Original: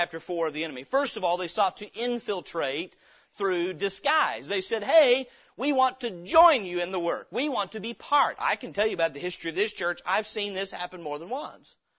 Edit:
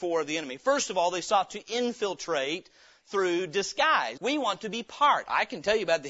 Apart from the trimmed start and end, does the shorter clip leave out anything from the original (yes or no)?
yes